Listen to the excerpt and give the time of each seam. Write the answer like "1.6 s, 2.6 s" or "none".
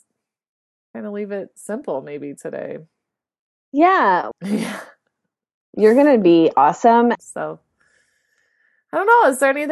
4.3 s, 7.2 s